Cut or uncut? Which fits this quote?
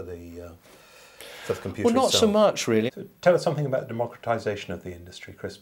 cut